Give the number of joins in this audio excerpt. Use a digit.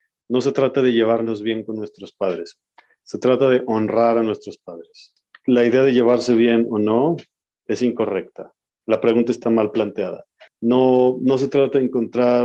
0